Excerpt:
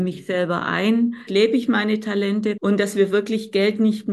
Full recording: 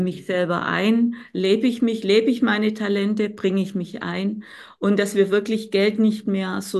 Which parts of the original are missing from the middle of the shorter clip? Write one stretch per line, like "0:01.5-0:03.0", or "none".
0:01.3-0:02.0
0:03.3-0:04.8